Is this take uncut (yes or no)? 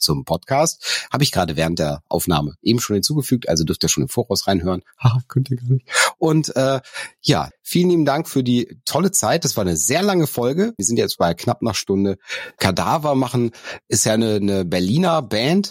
no